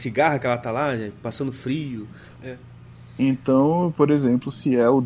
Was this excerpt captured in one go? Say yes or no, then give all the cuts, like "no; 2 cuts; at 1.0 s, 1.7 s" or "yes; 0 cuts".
no; 1 cut; at 2.4 s